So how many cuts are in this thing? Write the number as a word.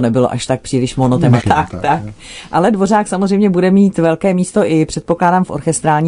one